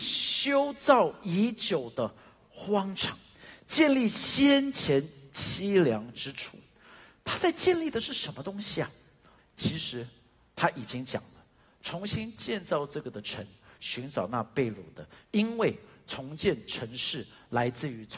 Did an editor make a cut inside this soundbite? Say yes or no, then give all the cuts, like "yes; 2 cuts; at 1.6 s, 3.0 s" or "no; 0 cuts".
yes; 3 cuts; at 9.4 s, 13.8 s, 15.2 s